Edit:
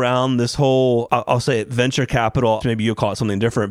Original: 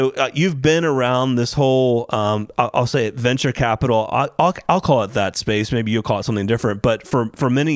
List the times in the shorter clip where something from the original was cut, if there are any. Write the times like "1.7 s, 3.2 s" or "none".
1.1 s, 2.6 s